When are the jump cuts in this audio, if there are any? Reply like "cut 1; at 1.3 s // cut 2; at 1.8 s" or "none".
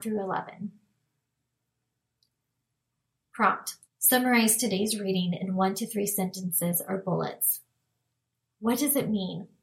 cut 1; at 3.8 s

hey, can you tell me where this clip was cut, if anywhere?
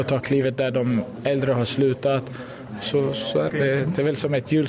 cut 1; at 3.5 s

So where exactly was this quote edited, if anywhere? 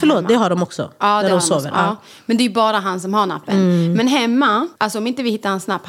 cut 1; at 4.8 s

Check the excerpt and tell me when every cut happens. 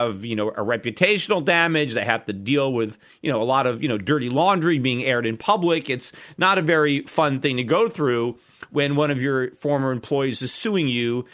none

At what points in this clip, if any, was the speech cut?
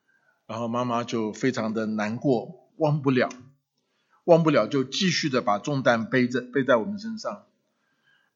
cut 1; at 2.7 s

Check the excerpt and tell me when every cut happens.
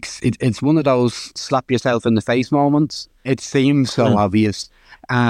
cut 1; at 3.2 s

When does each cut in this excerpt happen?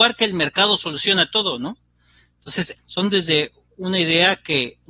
cut 1; at 2.8 s

